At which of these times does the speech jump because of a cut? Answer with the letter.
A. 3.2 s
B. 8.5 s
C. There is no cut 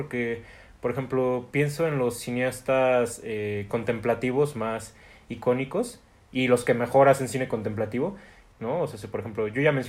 B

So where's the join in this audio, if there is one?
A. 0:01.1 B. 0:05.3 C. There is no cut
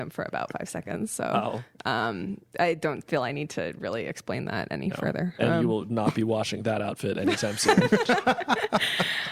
C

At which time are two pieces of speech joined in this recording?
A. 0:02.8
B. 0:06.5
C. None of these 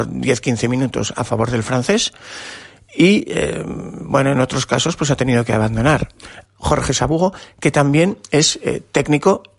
B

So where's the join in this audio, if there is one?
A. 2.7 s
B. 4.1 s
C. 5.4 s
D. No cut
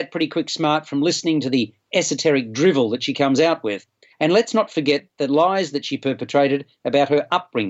B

